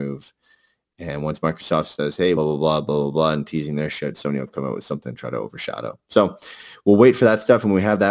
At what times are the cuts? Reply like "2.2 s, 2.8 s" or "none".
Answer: 2.4 s

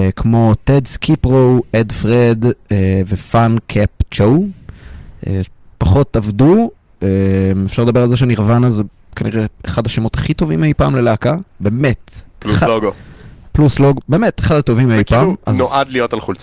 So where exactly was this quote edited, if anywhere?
none

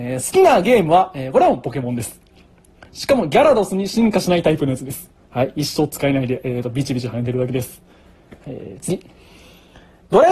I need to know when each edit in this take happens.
2.9 s

